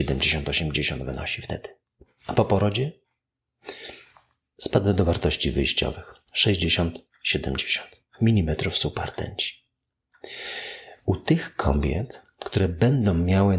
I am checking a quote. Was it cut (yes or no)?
no